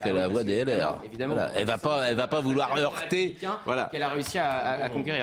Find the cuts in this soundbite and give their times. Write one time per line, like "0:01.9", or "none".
none